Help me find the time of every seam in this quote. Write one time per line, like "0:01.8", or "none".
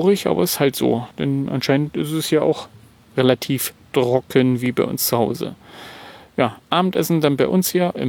0:01.1